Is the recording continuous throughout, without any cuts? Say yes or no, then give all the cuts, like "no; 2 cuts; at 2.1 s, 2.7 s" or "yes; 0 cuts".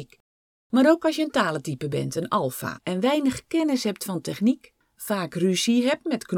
no; 1 cut; at 2.8 s